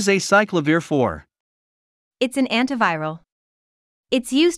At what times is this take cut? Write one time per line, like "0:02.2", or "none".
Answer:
none